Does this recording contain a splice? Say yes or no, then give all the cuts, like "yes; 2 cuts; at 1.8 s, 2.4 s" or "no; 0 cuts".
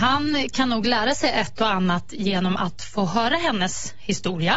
no; 0 cuts